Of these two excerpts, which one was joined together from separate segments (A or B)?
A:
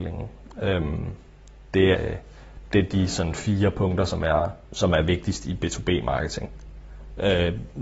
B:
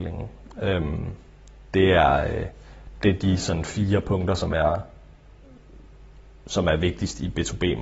A